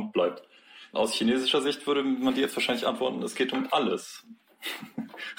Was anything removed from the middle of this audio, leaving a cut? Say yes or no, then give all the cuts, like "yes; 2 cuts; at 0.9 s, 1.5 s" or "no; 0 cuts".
yes; 1 cut; at 0.9 s